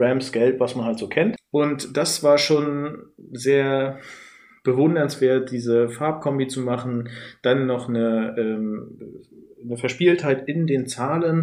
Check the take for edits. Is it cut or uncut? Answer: uncut